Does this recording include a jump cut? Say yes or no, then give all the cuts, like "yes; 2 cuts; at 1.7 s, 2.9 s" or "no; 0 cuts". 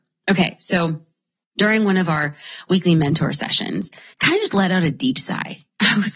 yes; 1 cut; at 4.1 s